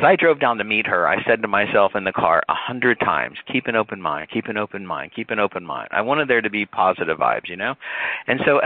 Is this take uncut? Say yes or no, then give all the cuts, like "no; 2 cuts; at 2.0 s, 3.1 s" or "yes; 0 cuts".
yes; 0 cuts